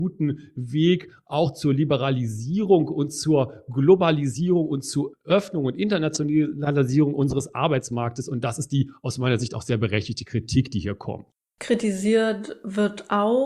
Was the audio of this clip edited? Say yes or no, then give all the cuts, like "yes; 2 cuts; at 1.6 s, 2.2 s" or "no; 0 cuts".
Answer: yes; 1 cut; at 5.1 s